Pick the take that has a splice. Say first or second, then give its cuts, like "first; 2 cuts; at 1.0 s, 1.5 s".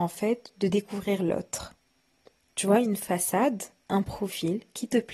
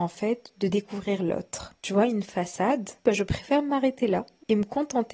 second; 2 cuts; at 1.8 s, 3.0 s